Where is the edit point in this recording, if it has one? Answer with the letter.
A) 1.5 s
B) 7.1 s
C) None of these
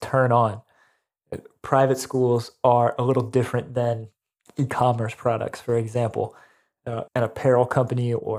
B